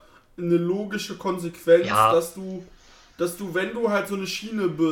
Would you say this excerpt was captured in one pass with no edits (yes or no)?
yes